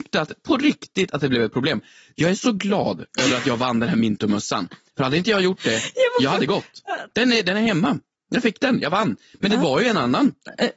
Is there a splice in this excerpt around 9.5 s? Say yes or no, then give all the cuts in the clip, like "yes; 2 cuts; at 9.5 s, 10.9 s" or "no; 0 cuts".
no; 1 cut; at 7.1 s